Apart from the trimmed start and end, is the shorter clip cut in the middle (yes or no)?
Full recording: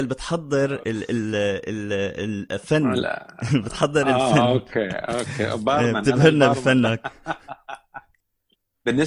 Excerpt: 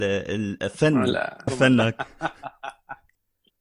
yes